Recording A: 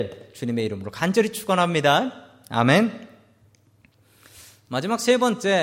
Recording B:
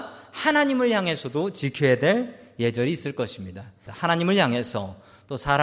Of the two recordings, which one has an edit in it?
B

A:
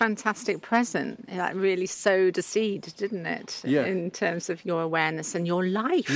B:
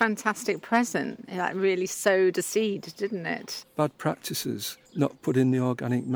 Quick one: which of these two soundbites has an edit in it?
B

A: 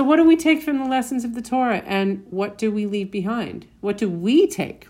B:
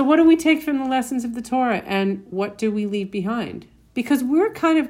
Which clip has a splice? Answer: B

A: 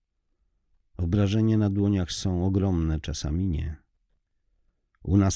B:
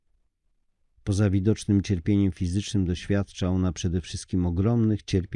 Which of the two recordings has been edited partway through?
A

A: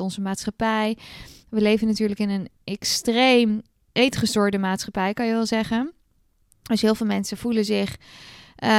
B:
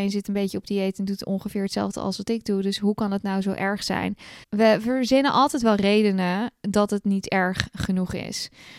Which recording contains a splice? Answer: B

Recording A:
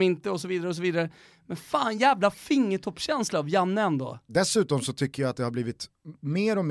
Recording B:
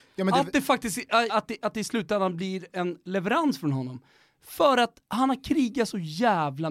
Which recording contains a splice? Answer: B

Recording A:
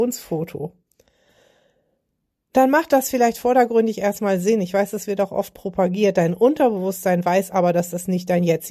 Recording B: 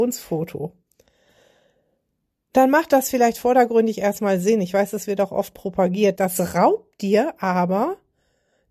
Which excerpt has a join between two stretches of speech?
B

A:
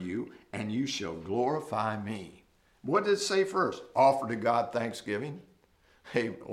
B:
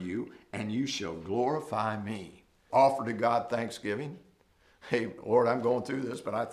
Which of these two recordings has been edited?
B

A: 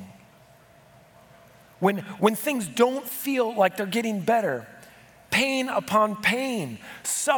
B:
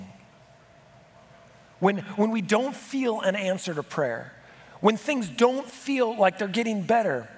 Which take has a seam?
A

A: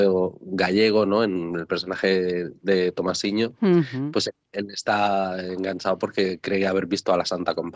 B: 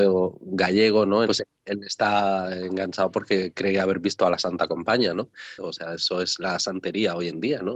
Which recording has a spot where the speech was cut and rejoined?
B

